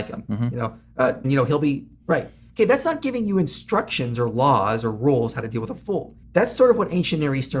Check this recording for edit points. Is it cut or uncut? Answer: cut